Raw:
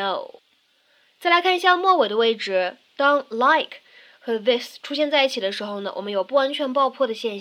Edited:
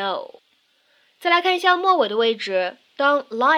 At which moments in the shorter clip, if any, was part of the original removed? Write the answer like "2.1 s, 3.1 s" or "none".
none